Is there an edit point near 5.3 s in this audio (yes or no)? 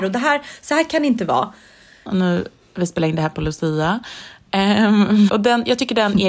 yes